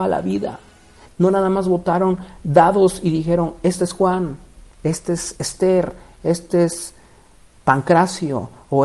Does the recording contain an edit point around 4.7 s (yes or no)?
no